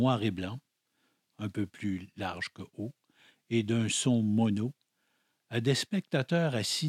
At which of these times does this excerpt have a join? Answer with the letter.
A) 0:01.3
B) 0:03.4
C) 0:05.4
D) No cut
A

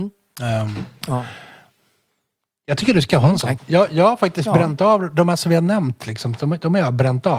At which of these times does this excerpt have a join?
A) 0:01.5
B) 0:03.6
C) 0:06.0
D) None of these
B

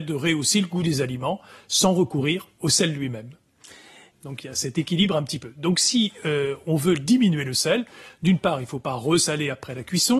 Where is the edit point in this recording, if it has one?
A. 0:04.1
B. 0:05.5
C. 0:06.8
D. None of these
A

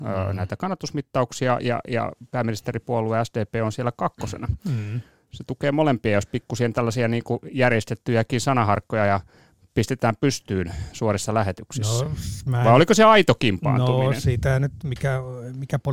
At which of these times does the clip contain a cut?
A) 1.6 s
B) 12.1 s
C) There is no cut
C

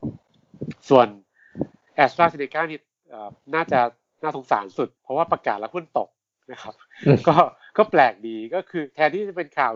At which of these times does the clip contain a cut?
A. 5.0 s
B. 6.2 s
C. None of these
A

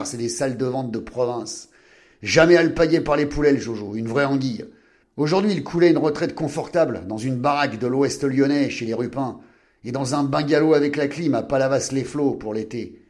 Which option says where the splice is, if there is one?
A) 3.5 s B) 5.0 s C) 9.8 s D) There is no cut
B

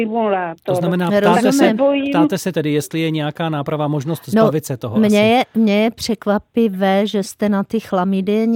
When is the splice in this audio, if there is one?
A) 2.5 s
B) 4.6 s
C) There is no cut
A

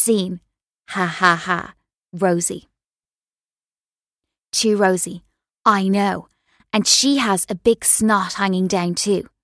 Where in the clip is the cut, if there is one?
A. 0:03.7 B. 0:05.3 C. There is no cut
C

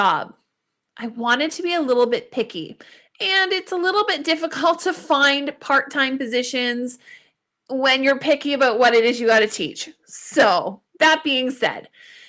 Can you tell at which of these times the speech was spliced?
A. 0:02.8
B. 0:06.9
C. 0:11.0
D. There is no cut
D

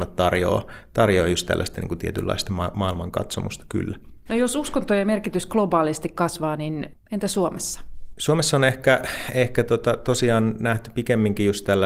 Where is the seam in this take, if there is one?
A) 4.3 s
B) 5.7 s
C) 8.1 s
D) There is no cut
A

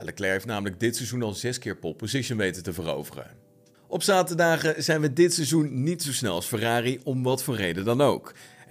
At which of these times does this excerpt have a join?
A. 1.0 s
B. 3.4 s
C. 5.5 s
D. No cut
D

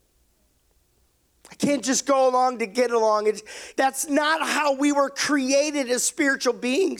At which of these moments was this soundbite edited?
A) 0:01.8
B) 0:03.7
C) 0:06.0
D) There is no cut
B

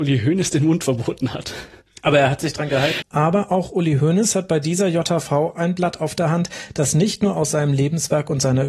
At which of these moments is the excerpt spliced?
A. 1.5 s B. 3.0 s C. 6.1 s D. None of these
B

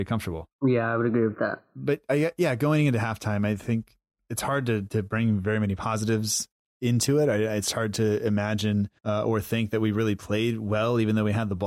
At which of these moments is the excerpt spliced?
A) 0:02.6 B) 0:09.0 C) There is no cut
B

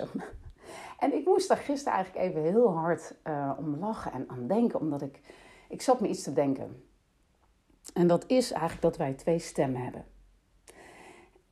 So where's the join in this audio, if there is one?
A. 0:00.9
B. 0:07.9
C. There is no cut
C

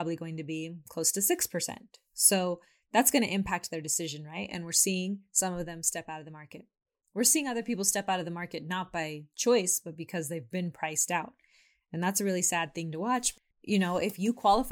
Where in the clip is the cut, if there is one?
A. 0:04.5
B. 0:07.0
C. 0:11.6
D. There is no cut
D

